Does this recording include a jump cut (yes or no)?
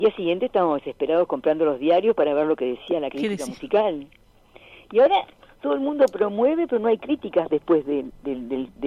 no